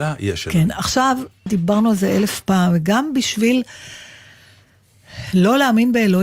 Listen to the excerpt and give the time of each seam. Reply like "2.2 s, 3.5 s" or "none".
1.5 s